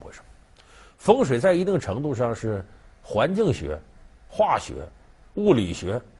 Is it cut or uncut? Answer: uncut